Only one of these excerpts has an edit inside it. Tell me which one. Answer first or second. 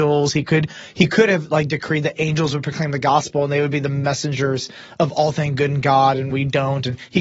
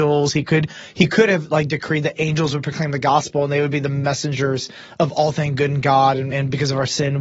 first